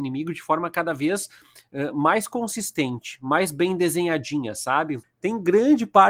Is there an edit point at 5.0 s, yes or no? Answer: yes